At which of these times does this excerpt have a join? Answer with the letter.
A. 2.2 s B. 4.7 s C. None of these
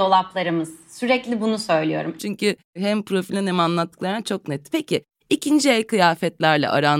A